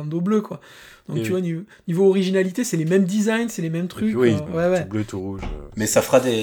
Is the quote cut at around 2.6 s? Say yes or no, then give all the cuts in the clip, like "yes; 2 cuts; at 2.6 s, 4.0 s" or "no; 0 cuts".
no; 1 cut; at 4.5 s